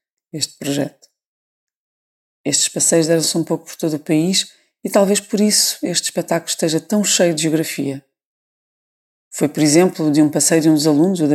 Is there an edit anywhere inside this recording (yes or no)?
no